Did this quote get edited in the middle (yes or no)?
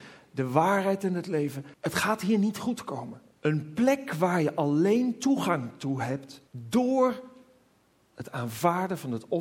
yes